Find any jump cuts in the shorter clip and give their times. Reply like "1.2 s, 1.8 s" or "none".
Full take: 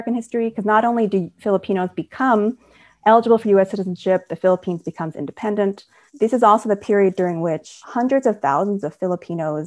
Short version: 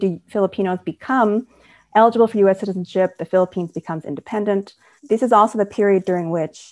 none

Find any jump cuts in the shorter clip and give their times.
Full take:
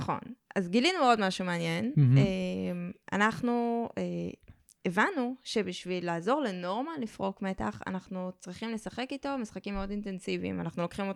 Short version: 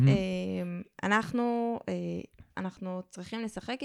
2.5 s

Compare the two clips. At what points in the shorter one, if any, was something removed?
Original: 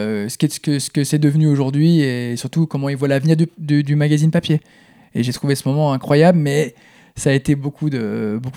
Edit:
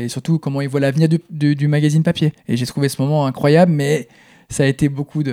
2.4 s

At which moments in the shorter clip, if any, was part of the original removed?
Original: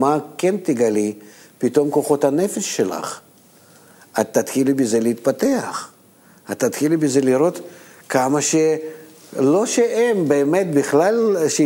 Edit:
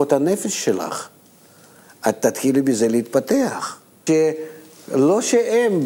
4.1 s

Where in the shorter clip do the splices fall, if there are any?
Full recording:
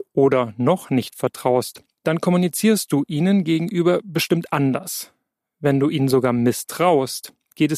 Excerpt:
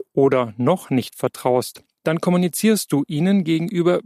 none

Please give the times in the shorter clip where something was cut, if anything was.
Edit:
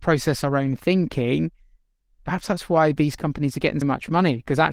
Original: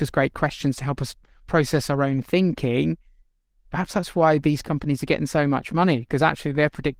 3.8 s

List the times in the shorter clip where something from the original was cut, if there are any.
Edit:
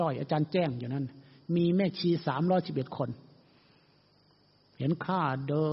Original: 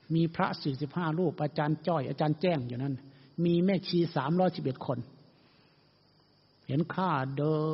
none

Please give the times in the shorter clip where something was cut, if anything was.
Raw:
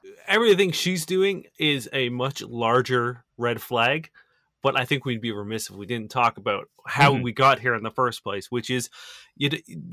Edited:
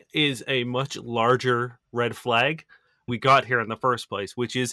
3.1 s

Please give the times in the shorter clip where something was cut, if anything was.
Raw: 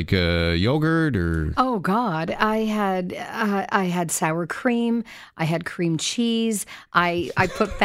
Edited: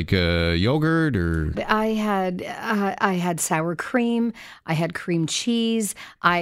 1.5 s

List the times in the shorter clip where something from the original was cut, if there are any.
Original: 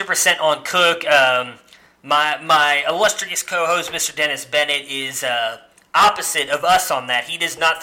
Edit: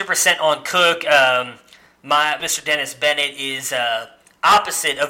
2.4 s

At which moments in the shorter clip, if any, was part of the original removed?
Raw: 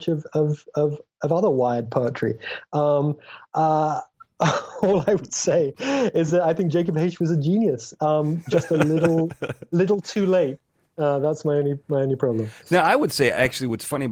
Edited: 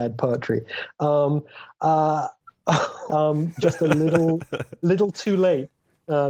3.1 s

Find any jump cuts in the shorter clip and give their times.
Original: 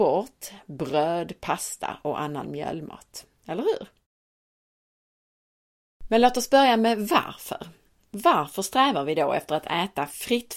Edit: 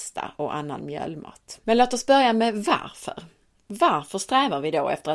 1.6 s

